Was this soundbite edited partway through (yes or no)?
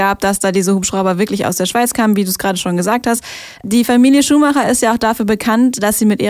no